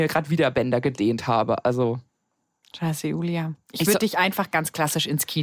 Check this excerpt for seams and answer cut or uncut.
uncut